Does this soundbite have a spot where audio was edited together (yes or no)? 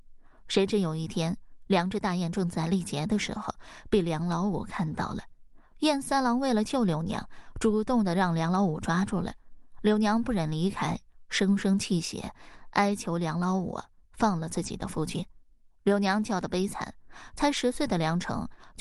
no